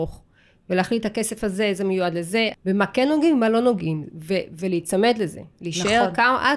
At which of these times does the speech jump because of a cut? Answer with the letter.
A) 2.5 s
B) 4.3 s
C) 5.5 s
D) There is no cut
A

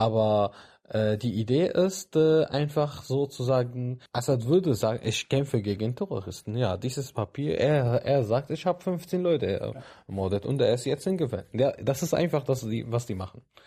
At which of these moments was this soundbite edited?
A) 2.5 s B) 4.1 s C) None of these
B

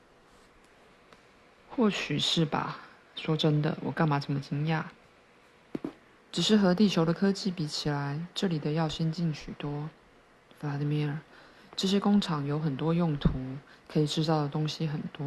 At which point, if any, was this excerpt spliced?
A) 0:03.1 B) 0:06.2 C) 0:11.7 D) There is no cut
B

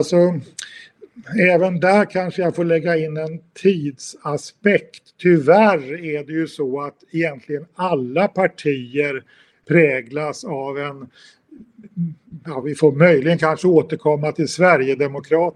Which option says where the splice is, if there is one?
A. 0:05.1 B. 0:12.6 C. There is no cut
C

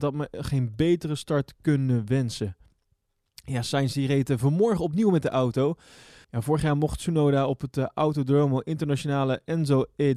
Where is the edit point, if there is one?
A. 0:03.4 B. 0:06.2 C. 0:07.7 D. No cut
B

